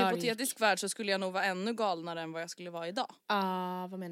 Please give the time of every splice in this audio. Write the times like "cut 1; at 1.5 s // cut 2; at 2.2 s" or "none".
cut 1; at 3.2 s

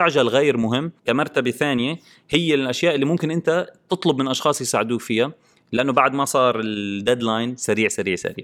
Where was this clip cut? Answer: cut 1; at 1.0 s

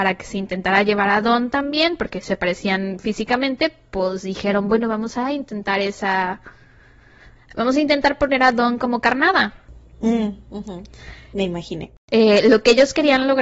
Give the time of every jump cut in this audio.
none

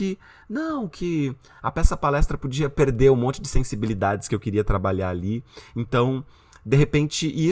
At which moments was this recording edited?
none

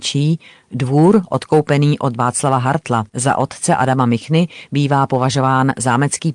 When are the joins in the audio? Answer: cut 1; at 3.1 s

